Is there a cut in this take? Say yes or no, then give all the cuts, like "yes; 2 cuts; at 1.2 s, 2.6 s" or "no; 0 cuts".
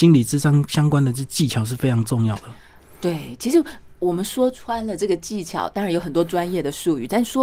no; 0 cuts